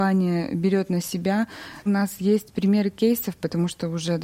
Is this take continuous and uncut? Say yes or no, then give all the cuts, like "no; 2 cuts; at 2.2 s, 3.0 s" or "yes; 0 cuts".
no; 1 cut; at 1.8 s